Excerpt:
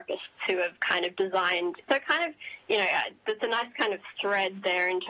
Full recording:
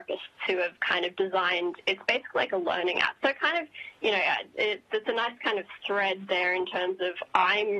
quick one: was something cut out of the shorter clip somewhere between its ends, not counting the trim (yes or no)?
yes